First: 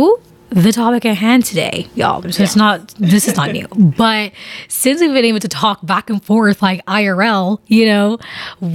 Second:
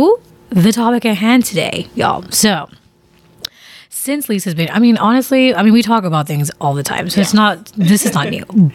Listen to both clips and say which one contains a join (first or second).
first